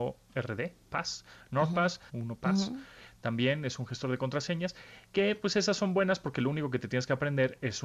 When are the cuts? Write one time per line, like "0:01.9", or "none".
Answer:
0:02.1